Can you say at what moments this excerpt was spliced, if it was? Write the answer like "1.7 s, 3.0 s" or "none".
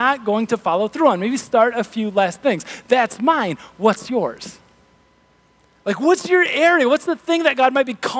none

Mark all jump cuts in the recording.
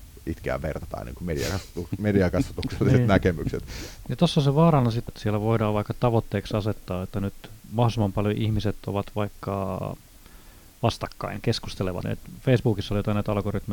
4.0 s, 5.1 s, 12.0 s

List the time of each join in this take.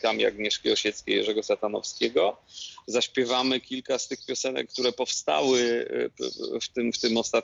2.8 s

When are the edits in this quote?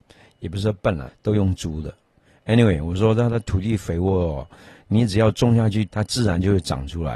1.1 s, 5.9 s

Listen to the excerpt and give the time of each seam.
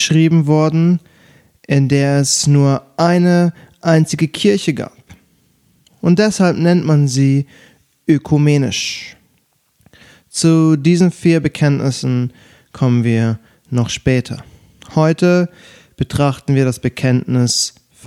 none

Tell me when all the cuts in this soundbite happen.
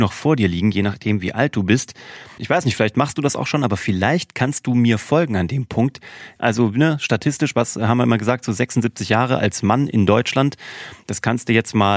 2.4 s, 6.4 s

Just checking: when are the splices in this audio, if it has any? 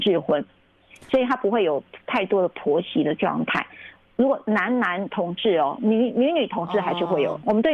1.1 s

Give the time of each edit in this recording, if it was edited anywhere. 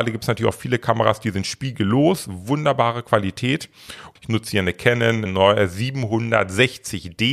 4.2 s, 5.3 s

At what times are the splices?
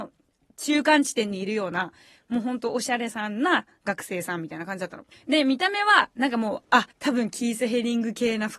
5.1 s, 6.9 s

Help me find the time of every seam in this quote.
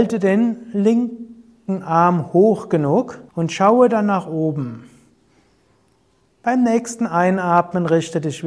3.3 s, 6.3 s

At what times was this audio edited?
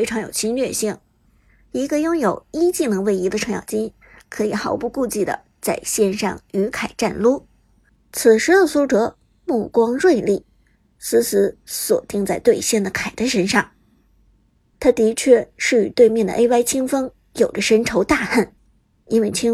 7.9 s

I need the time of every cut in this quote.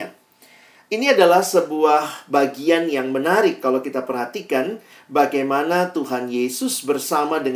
none

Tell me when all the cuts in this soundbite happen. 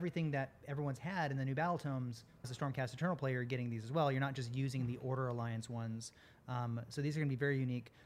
2.4 s

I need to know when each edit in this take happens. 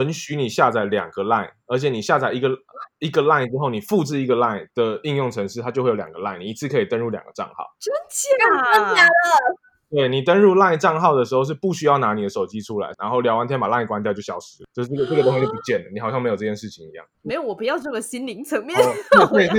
12.9 s, 17.1 s

